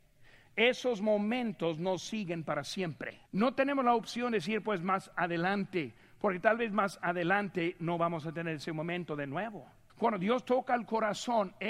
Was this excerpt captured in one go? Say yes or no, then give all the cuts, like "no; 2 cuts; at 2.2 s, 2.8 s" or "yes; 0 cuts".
no; 2 cuts; at 3.3 s, 9.9 s